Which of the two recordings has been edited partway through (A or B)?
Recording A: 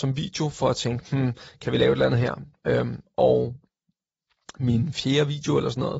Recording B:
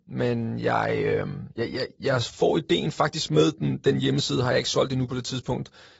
B